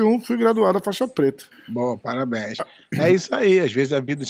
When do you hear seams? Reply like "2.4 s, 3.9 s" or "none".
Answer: 1.5 s